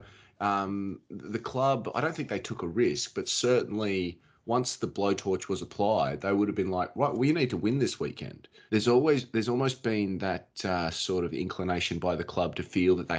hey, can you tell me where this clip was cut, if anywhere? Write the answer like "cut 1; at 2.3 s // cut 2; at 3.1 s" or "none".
cut 1; at 8.7 s